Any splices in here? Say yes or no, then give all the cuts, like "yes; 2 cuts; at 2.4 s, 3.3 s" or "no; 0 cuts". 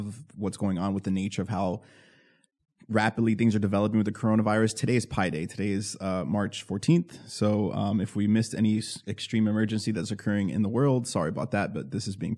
no; 0 cuts